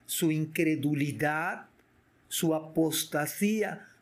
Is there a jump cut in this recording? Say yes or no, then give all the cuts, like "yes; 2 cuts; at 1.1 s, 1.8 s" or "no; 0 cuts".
no; 0 cuts